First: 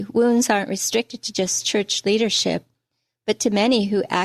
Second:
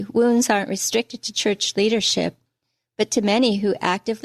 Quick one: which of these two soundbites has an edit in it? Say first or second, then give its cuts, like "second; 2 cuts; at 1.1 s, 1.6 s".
second; 1 cut; at 1.3 s